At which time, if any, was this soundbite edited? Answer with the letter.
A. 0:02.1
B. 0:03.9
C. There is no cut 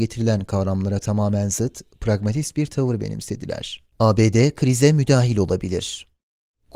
B